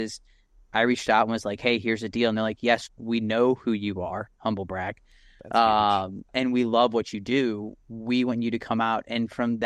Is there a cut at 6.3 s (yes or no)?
yes